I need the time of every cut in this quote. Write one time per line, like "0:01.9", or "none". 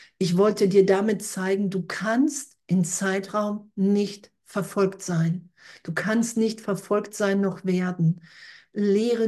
none